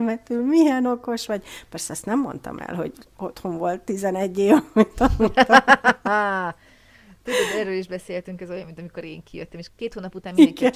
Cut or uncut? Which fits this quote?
uncut